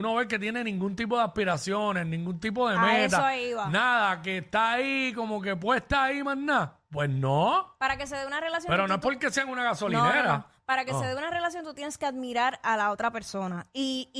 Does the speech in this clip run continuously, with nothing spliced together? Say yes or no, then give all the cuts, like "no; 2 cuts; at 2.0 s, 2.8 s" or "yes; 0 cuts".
yes; 0 cuts